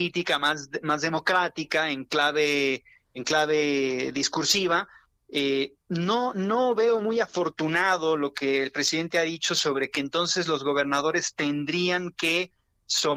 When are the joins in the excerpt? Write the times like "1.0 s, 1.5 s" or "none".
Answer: none